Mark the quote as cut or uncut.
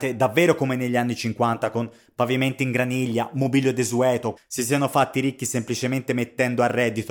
cut